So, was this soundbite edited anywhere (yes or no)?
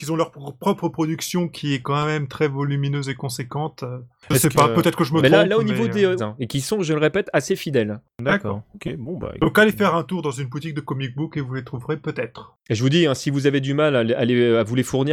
yes